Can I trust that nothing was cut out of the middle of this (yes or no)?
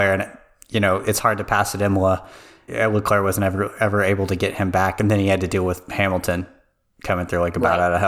no